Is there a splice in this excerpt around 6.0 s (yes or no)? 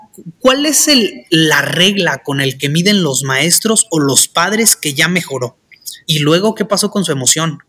yes